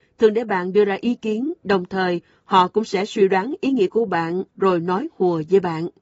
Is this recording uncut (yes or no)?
yes